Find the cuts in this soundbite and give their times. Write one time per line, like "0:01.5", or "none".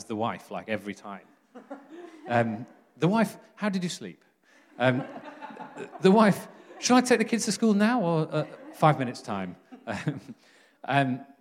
none